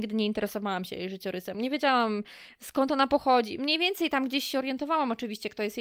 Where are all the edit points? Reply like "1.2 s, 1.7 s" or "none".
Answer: none